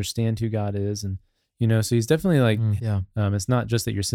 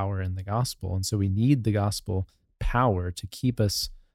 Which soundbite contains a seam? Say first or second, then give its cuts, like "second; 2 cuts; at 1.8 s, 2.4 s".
first; 1 cut; at 2.8 s